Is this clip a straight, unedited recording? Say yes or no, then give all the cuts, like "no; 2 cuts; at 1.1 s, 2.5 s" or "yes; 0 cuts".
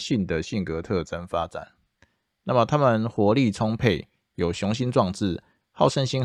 yes; 0 cuts